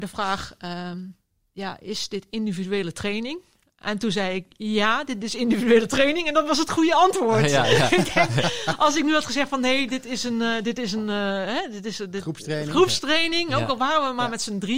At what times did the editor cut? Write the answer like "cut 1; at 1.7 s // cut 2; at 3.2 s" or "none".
none